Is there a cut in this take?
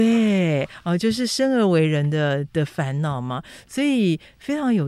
no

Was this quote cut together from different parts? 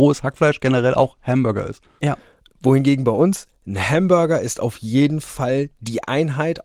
yes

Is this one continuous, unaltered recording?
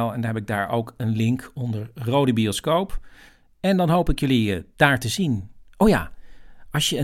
yes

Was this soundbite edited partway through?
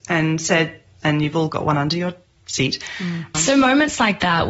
yes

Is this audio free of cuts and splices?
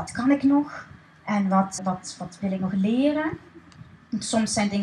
no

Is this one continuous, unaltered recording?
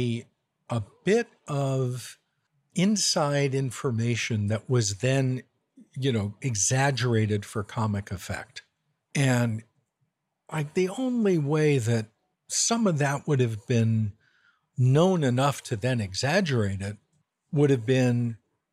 yes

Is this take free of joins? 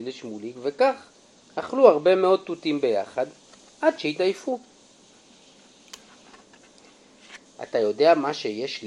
no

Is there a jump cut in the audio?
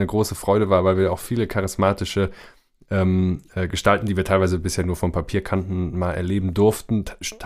no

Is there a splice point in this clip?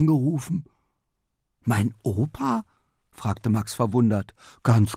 no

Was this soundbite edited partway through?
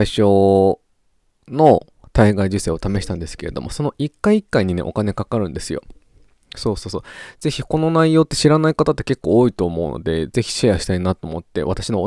no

